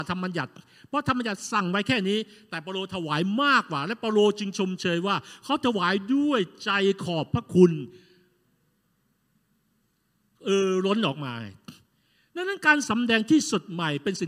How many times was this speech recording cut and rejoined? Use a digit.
0